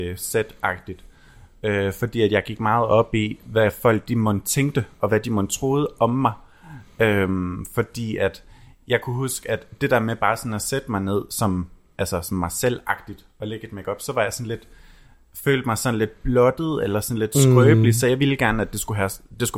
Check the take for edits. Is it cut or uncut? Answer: uncut